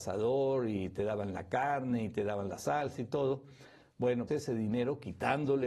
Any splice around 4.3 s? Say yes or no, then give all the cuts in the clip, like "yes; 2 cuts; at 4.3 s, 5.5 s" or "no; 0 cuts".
yes; 1 cut; at 4.3 s